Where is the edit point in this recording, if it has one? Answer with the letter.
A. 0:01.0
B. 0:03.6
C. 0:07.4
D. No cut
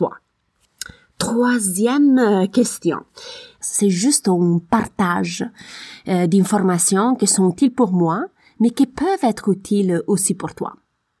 B